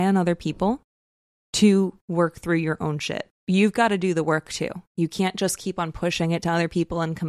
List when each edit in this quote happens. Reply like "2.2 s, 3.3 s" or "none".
3.4 s